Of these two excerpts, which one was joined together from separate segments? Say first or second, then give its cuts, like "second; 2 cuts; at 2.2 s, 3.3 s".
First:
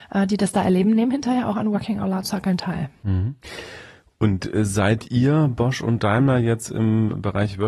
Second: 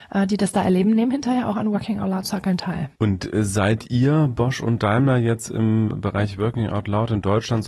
second; 1 cut; at 2.9 s